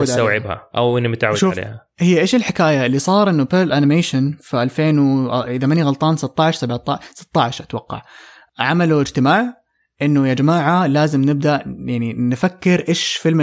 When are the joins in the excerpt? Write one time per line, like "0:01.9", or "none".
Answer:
none